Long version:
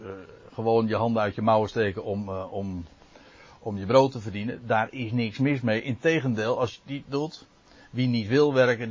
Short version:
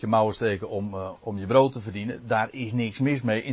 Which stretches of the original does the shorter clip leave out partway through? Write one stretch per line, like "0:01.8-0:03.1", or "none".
0:02.5-0:03.5